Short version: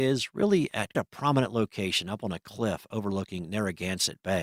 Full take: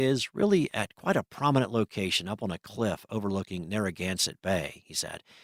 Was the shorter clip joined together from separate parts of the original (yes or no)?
yes